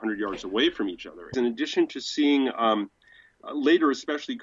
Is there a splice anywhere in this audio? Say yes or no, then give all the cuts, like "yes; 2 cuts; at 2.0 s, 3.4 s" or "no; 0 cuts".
yes; 1 cut; at 1.3 s